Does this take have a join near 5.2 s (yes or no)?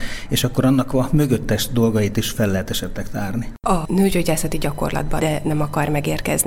yes